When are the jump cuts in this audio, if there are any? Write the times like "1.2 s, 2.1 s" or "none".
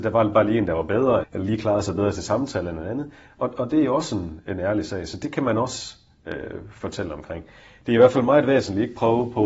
1.2 s